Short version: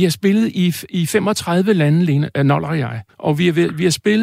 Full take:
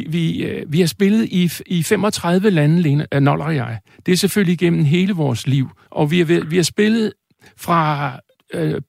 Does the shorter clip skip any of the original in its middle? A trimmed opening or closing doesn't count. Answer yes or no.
yes